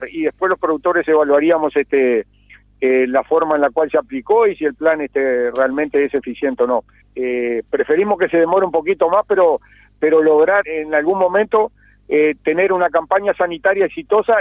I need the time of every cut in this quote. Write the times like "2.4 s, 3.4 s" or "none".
7.0 s, 10.6 s